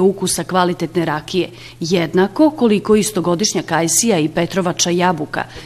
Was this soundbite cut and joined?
no; 0 cuts

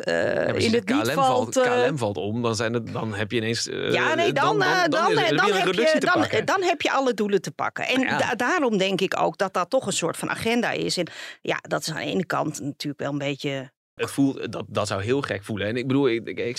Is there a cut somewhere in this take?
yes; 2 cuts; at 2.9 s, 14.0 s

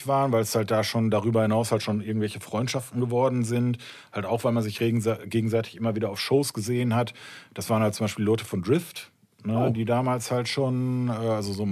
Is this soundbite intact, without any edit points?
yes; 0 cuts

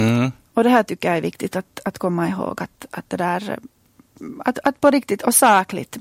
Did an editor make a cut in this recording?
no; 0 cuts

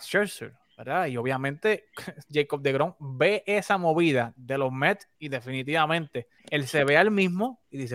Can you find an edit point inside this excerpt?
yes; 1 cut; at 6.4 s

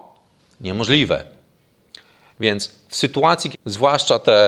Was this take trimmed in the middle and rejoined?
yes; 1 cut; at 3.5 s

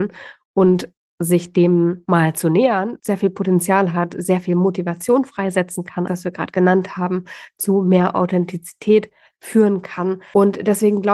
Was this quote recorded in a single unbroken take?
no; 2 cuts; at 3.0 s, 6.1 s

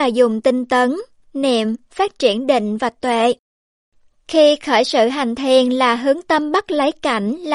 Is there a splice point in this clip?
no; 0 cuts

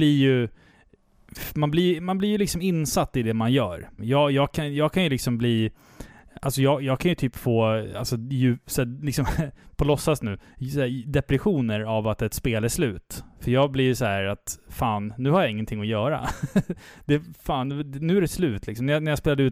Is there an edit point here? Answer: yes; 1 cut; at 4.0 s

